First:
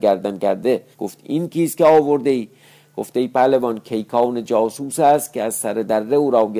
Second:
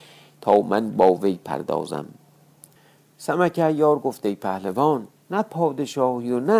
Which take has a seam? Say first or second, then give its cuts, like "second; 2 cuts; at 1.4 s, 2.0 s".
first; 1 cut; at 0.9 s